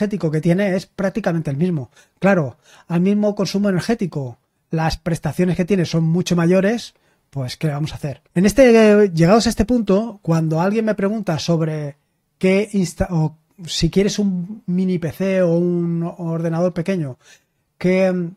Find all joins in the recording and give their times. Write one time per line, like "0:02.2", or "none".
0:08.3